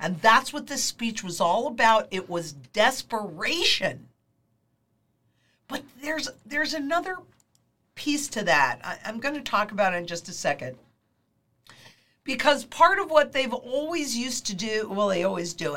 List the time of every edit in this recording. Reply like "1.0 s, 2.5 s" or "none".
none